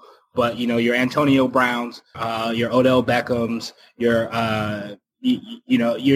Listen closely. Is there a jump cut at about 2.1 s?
yes; 1 cut; at 2.1 s

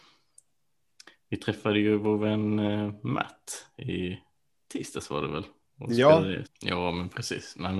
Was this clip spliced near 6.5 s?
yes; 1 cut; at 6.5 s

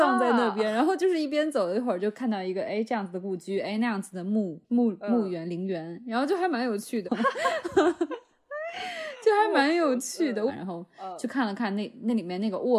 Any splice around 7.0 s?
yes; 3 cuts; at 4.6 s, 7.0 s, 10.5 s

